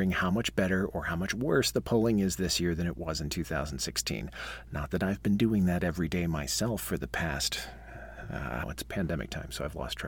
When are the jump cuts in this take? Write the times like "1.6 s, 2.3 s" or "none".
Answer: 8.6 s